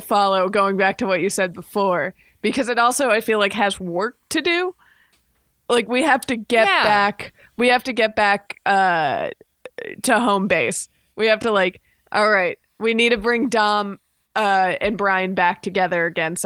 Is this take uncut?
yes; 0 cuts

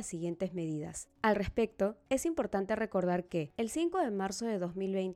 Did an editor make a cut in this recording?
yes; 2 cuts; at 1.1 s, 3.5 s

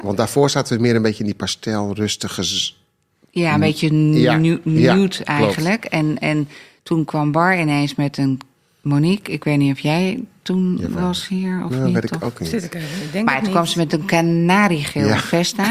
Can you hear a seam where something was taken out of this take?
no; 0 cuts

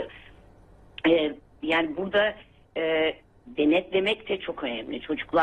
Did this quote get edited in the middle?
no; 0 cuts

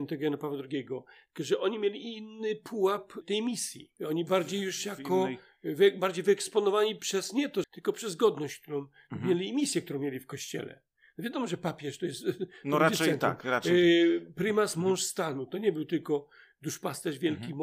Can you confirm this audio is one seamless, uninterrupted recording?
no; 1 cut; at 7.6 s

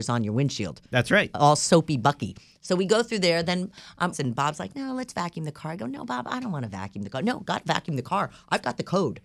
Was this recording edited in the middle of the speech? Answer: yes; 1 cut; at 4.1 s

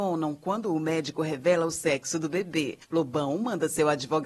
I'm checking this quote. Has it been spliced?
yes; 1 cut; at 2.8 s

